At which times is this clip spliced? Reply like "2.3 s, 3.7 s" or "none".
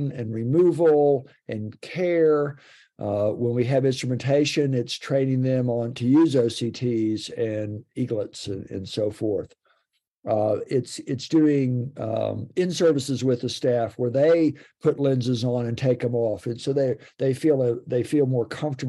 none